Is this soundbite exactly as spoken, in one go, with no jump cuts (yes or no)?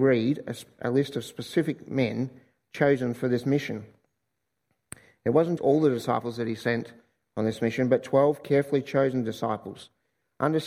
no